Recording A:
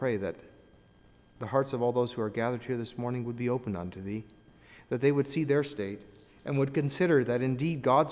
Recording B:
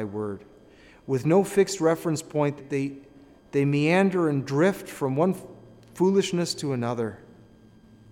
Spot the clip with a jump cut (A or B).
B